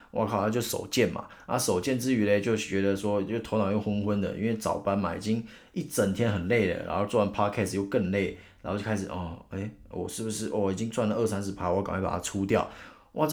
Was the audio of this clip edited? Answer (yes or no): no